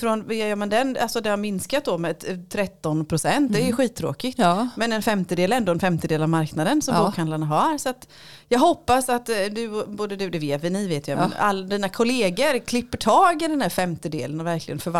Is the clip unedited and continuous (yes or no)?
yes